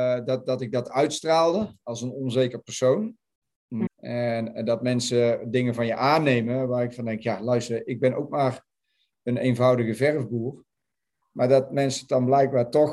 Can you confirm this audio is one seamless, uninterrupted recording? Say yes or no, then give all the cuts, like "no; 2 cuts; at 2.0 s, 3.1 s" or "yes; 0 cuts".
no; 2 cuts; at 3.9 s, 11.2 s